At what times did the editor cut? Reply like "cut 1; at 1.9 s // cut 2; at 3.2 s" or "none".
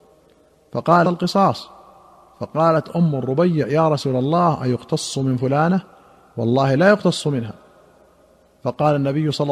cut 1; at 1.0 s